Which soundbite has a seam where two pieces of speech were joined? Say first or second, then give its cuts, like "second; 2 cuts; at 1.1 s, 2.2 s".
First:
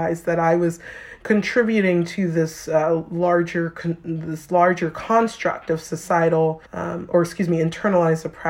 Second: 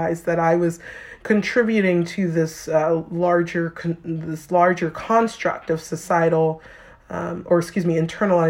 first; 1 cut; at 6.6 s